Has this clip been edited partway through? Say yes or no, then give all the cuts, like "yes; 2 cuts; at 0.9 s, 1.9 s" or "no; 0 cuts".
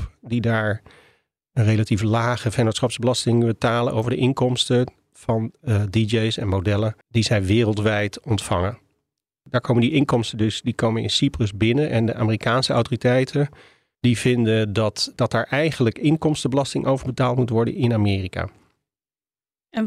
yes; 1 cut; at 7.0 s